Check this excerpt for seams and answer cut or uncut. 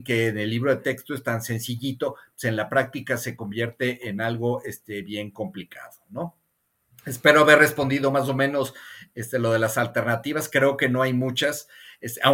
uncut